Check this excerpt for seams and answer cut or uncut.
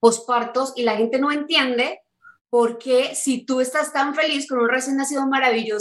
uncut